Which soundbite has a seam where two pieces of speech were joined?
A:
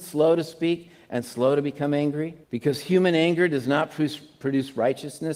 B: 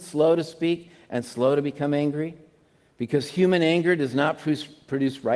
A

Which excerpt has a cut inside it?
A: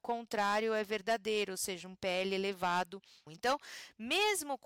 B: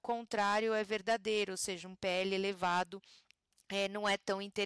A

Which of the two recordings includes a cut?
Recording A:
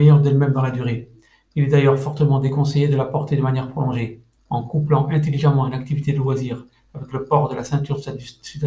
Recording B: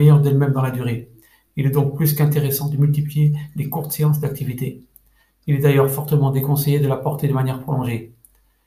A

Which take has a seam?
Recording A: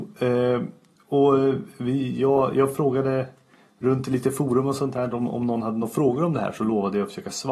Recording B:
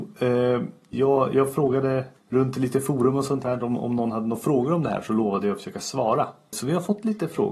B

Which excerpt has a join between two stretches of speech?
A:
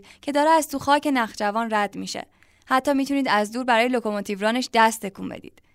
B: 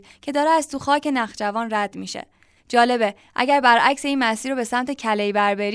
B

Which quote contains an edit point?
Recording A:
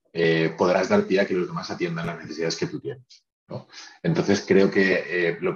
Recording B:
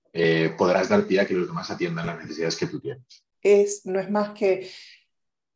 B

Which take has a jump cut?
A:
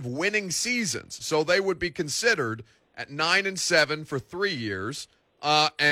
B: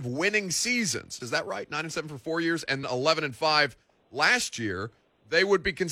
B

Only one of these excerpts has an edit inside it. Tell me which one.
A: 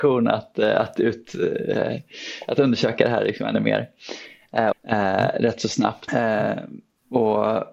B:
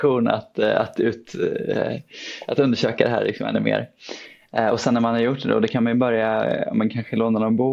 A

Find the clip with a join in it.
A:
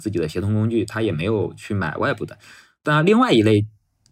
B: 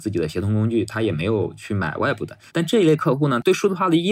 B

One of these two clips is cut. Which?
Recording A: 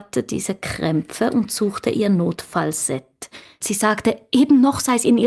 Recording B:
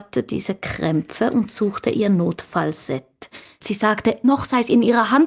B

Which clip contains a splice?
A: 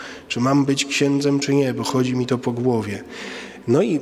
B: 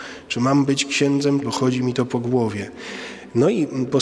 B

